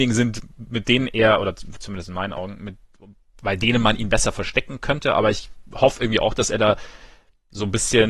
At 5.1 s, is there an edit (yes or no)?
no